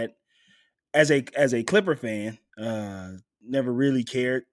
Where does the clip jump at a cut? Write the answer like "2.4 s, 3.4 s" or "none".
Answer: 2.5 s